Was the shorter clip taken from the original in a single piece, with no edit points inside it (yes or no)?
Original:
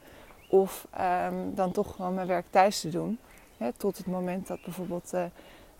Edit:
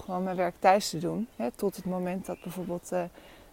no